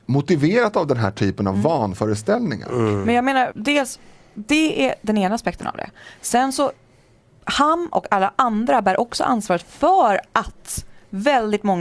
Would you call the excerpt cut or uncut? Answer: cut